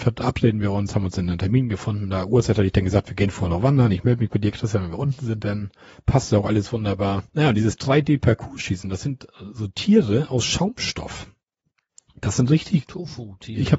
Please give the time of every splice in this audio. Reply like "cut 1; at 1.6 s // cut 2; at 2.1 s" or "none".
cut 1; at 7.3 s